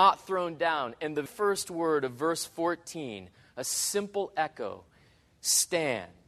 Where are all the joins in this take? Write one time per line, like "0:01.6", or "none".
0:01.3

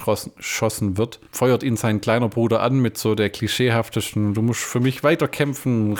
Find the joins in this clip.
none

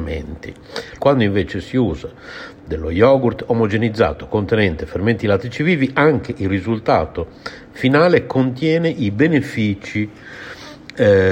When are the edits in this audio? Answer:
0:01.0

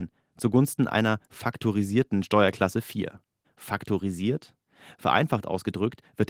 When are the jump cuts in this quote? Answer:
none

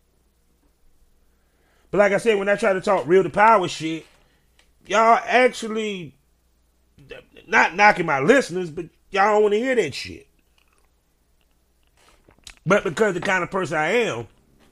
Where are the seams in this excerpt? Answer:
none

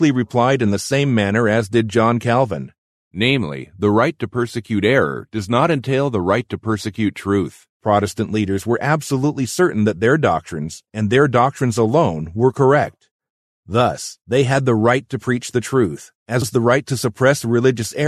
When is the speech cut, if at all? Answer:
0:07.7
0:16.4

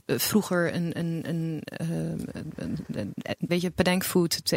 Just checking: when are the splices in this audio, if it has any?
0:03.5

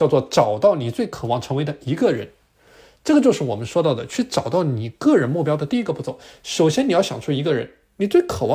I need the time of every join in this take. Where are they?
none

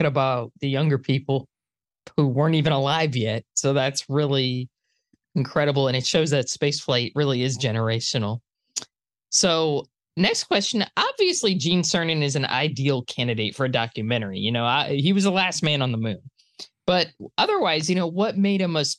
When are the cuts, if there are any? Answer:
none

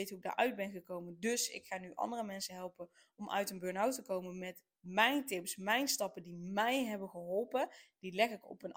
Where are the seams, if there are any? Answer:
none

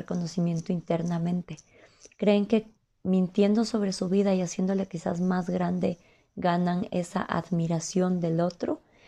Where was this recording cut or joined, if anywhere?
0:02.1

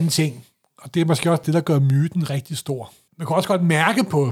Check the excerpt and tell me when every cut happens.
0:01.4
0:03.1

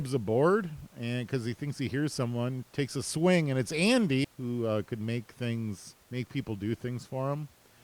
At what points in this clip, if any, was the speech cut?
0:04.2
0:06.0

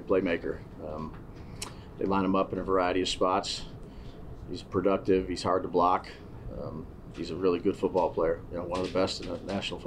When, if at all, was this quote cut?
none

